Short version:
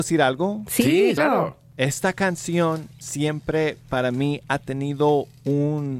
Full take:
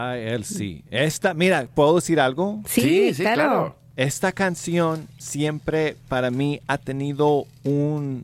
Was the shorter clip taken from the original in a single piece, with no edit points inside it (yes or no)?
no